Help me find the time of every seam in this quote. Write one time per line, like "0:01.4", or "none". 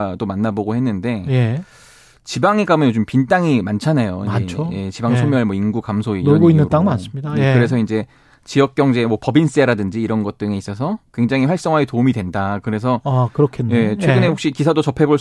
none

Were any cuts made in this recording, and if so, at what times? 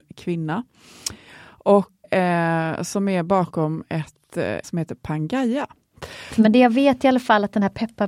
0:02.0
0:04.6
0:06.3

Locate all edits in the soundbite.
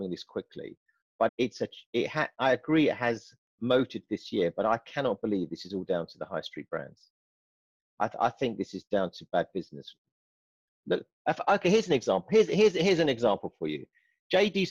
0:01.3

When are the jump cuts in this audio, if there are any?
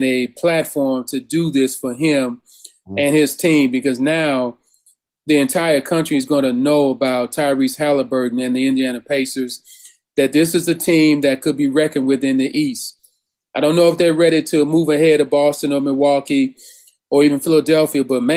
none

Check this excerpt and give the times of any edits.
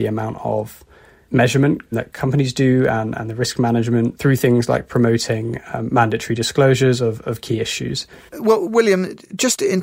0:08.3

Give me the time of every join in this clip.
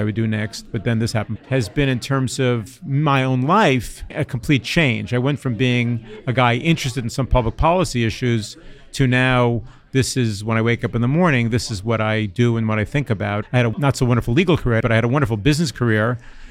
0:01.4
0:13.4
0:14.8

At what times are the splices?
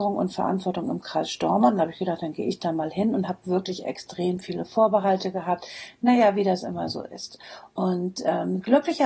none

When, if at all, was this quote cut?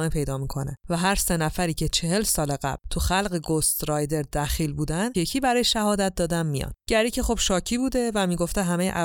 0:05.1
0:06.8

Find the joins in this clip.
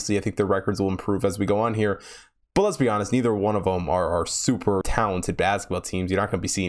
0:04.8

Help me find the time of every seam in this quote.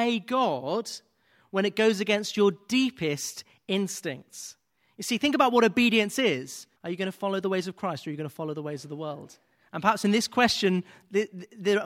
0:06.8

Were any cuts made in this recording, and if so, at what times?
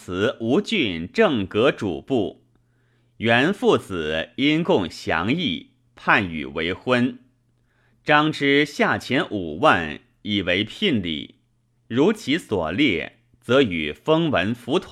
0:11.8

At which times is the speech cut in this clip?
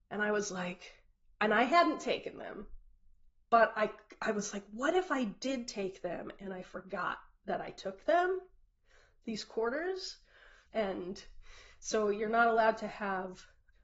0:10.7

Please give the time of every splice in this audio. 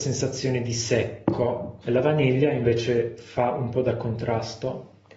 0:01.8

